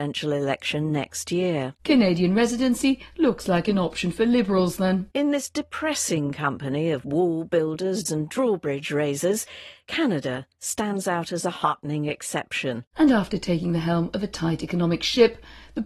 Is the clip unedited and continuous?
no; 2 cuts; at 8.1 s, 12.9 s

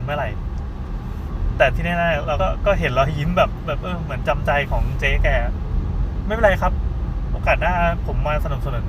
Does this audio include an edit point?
yes; 1 cut; at 2.4 s

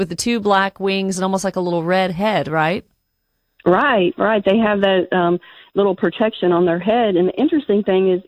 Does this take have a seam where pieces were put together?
no; 0 cuts

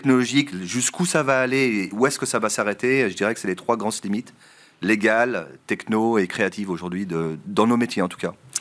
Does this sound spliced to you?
no; 0 cuts

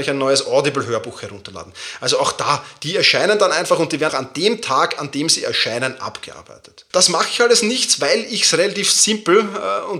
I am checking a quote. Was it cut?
yes; 2 cuts; at 4.1 s, 6.9 s

